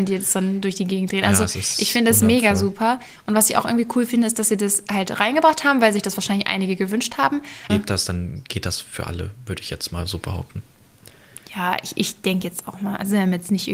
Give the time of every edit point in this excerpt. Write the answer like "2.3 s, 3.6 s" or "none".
7.7 s